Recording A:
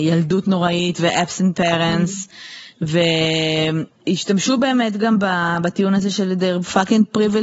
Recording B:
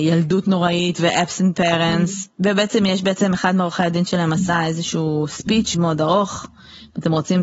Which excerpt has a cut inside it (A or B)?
B